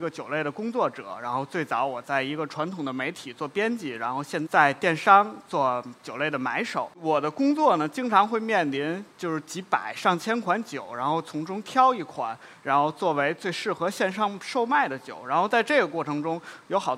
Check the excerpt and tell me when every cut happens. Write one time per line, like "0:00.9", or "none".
0:04.5